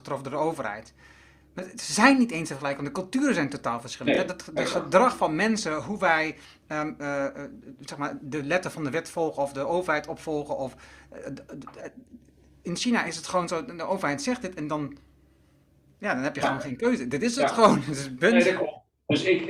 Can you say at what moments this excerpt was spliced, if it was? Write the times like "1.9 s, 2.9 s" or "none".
none